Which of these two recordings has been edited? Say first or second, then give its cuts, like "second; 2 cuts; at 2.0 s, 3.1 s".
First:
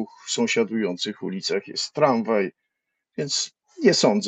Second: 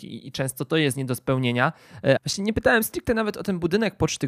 second; 1 cut; at 2.2 s